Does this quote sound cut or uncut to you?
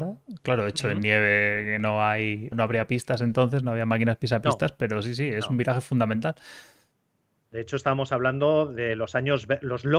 cut